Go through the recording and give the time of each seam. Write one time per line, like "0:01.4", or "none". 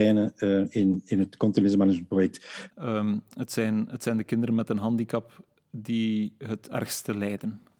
0:02.7